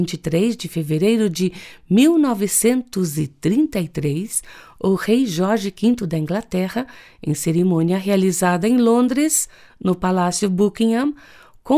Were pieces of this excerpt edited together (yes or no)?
no